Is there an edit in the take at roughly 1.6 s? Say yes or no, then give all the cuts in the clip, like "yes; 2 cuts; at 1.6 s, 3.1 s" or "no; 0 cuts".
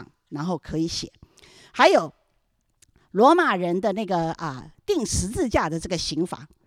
no; 0 cuts